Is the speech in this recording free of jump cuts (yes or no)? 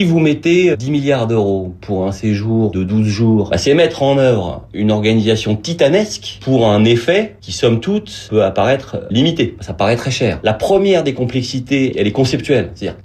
no